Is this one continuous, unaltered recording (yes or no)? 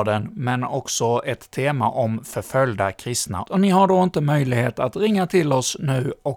no